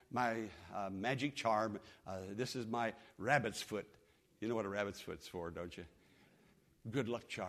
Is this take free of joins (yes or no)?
yes